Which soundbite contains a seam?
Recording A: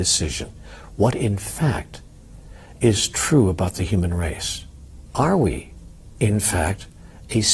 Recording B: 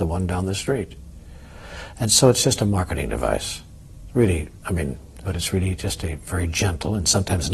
B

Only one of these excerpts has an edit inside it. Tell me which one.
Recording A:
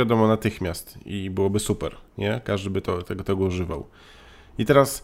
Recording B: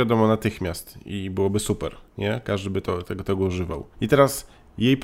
B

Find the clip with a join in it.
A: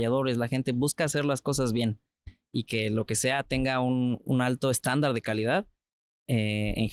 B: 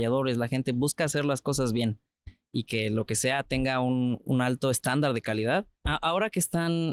B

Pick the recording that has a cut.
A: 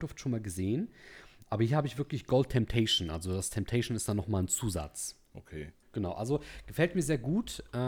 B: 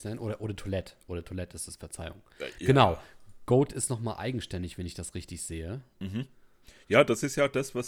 A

